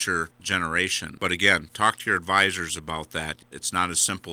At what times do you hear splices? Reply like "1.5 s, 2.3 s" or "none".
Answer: 1.2 s